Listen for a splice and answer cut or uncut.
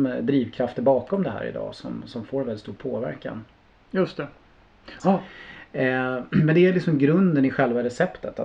cut